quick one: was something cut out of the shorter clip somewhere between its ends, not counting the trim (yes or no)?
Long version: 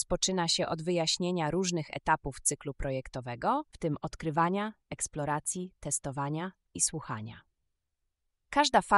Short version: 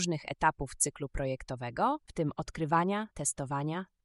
yes